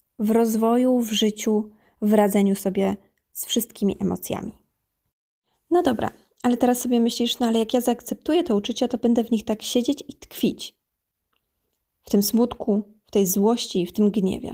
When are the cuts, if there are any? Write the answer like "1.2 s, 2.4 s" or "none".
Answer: none

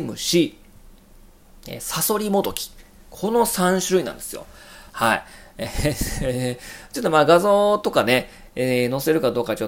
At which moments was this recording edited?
4.9 s

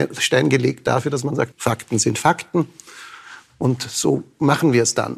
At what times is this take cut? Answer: 1.5 s

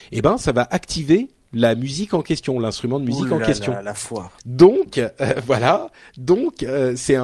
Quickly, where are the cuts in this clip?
4.4 s

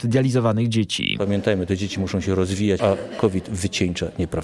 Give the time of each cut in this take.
2.8 s

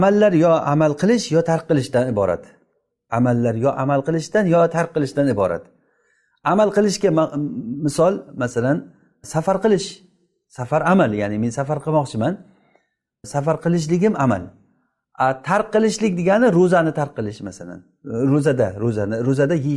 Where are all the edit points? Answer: none

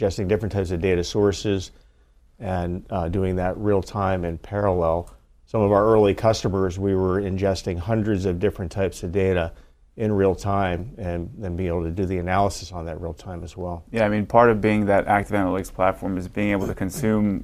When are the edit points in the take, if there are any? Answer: none

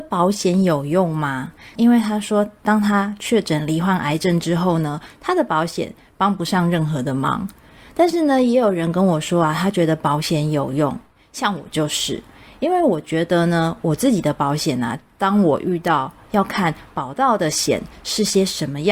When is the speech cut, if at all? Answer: 1.8 s, 16.3 s

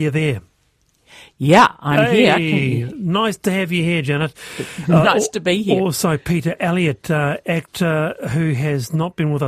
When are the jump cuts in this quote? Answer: none

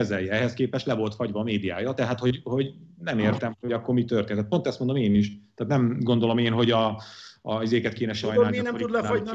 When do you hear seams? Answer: none

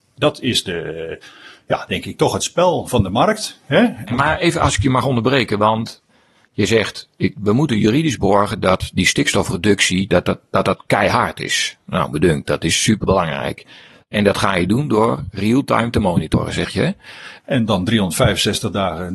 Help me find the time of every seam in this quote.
17.4 s

